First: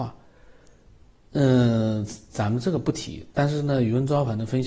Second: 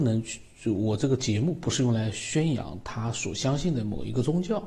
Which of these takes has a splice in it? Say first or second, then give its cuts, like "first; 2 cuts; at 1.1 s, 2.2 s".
first; 1 cut; at 1.3 s